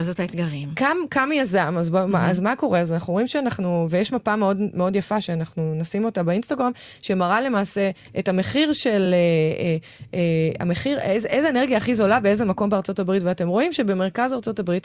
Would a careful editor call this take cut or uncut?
uncut